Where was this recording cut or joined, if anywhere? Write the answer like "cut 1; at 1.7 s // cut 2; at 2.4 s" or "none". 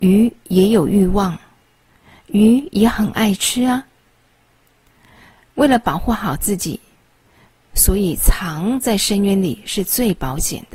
none